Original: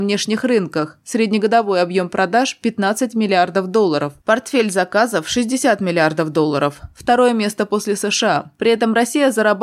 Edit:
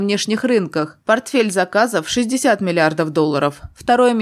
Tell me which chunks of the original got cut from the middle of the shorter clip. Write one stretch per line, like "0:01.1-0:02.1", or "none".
0:01.0-0:04.2